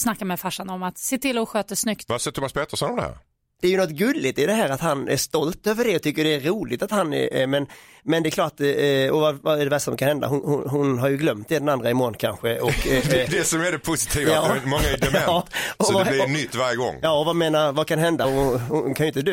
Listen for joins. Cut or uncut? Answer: uncut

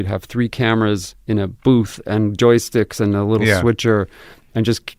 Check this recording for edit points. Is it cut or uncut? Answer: uncut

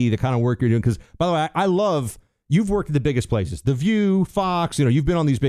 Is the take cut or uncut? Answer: uncut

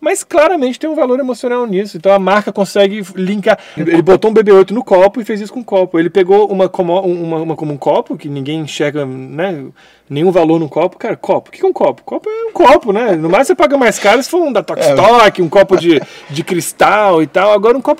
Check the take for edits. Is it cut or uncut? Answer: cut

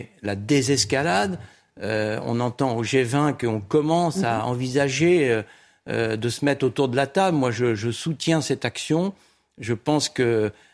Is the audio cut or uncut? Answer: uncut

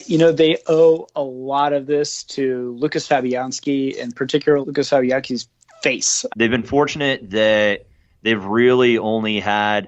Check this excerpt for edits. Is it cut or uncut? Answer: cut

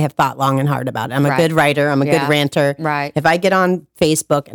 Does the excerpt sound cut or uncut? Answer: uncut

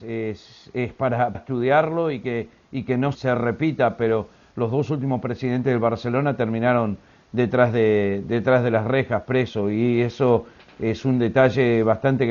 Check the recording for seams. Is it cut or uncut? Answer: cut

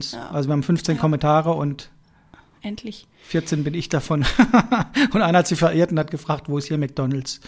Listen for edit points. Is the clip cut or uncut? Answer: uncut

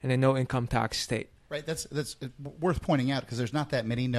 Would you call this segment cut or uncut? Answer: cut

